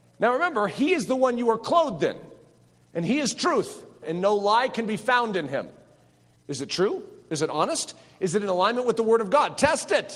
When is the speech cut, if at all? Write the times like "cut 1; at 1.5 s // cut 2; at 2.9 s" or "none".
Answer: cut 1; at 4.0 s // cut 2; at 6.4 s